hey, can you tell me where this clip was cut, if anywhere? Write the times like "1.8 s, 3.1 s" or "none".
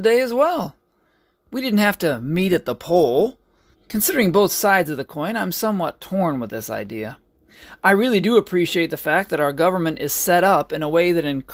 3.7 s